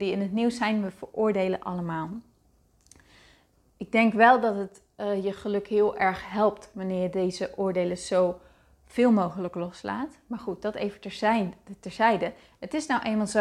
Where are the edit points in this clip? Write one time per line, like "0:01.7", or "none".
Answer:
none